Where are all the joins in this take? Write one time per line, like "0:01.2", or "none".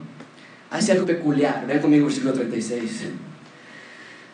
0:01.0